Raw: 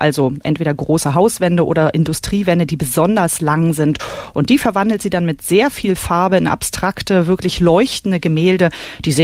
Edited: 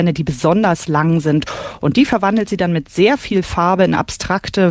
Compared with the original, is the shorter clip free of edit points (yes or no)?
yes